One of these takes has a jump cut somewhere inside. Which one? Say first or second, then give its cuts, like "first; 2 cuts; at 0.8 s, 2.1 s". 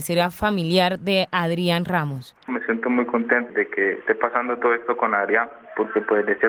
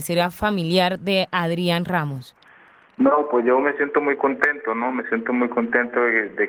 first; 2 cuts; at 2.5 s, 3.5 s